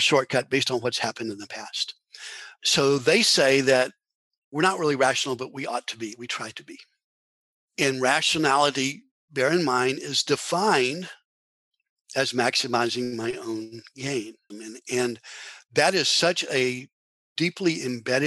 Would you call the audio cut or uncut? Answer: cut